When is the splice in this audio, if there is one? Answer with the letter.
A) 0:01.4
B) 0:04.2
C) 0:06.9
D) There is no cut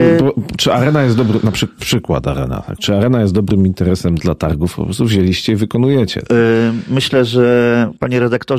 B